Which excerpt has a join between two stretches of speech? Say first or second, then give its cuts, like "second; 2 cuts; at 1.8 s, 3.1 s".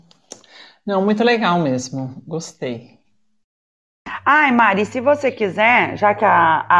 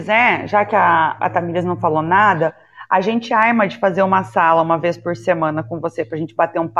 second; 1 cut; at 1.2 s